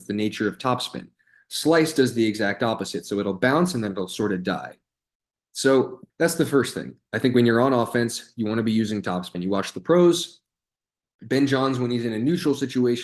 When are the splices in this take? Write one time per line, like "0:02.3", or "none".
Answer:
0:06.1
0:09.3